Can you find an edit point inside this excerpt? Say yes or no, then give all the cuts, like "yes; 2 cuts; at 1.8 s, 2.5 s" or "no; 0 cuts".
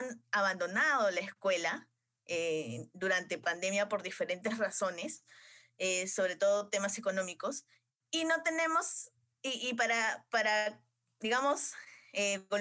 no; 0 cuts